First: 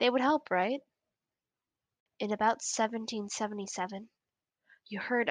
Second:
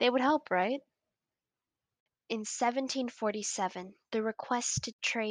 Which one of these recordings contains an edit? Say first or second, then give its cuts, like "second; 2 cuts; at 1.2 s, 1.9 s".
second; 1 cut; at 2.1 s